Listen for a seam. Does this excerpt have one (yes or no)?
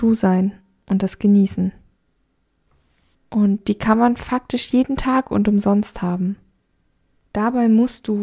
yes